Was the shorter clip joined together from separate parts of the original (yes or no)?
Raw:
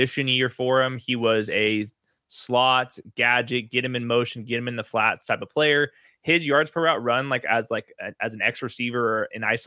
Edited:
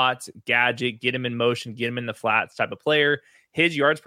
no